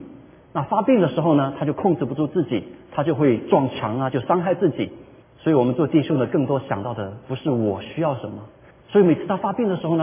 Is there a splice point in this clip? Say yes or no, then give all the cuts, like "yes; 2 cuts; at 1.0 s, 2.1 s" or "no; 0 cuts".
yes; 2 cuts; at 5.2 s, 8.7 s